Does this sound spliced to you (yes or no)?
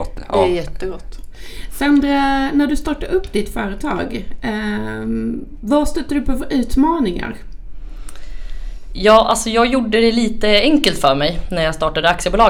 no